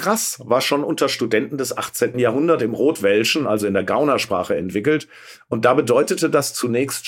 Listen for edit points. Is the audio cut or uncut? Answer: cut